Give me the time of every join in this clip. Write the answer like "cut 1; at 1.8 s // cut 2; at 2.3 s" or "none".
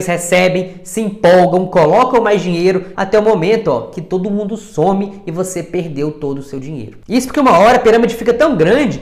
cut 1; at 2.9 s